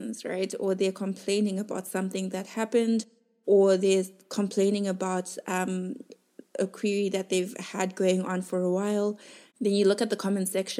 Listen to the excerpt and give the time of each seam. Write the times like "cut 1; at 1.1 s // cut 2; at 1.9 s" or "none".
cut 1; at 9.5 s